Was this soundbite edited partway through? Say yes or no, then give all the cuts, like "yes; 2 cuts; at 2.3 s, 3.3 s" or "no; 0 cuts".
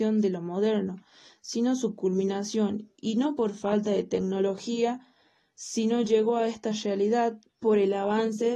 yes; 1 cut; at 7.5 s